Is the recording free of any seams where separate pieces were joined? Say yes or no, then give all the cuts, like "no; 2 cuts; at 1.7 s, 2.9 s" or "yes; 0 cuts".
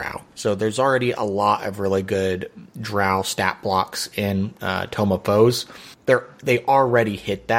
no; 1 cut; at 5.9 s